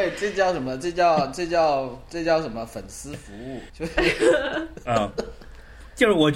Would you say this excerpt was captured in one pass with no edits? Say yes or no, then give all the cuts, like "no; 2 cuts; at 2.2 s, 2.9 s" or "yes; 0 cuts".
no; 1 cut; at 3.7 s